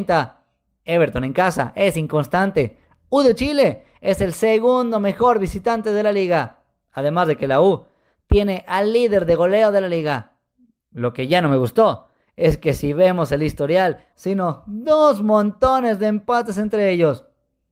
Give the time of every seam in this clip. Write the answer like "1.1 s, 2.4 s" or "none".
14.1 s